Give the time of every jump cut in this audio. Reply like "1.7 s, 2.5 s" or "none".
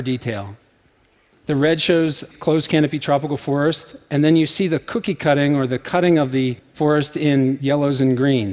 2.3 s